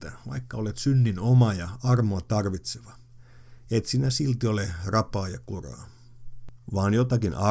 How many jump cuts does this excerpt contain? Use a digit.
0